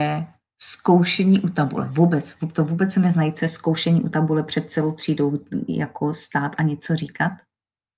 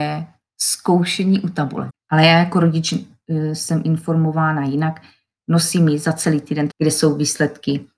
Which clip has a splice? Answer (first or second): second